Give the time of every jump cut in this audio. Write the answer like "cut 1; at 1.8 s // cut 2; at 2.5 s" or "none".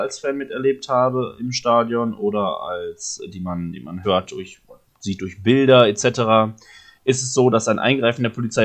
cut 1; at 4.0 s